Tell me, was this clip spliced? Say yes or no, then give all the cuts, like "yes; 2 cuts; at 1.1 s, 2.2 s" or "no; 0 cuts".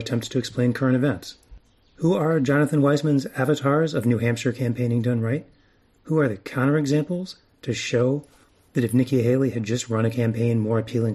no; 0 cuts